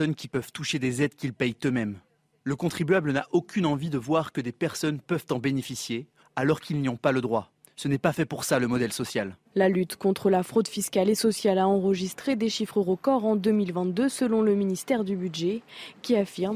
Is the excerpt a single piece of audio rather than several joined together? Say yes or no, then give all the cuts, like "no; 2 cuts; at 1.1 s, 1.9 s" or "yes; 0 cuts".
no; 2 cuts; at 6.2 s, 9.5 s